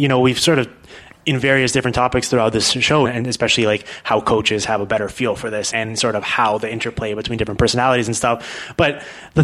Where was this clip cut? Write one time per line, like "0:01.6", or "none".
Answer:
0:03.0
0:05.7